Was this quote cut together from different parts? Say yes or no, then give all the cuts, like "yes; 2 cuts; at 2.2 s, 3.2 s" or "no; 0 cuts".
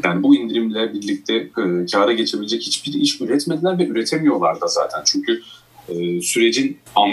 no; 0 cuts